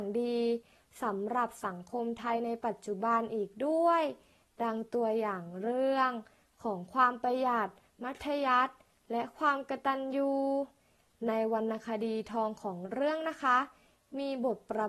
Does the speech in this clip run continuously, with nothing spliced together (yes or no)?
yes